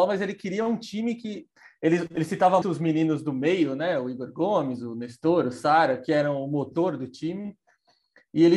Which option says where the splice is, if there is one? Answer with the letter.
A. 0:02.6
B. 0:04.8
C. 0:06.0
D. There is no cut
A